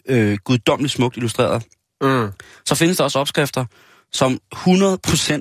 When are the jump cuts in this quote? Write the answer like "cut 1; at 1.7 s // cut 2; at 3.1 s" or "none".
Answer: none

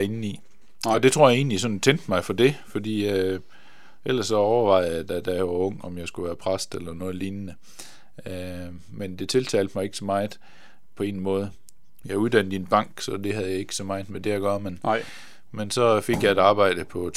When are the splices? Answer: cut 1; at 12.0 s

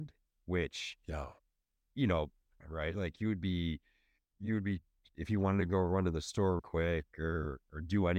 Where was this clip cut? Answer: cut 1; at 2.6 s // cut 2; at 6.6 s

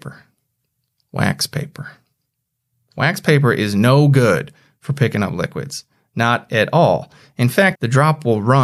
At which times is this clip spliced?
cut 1; at 7.7 s

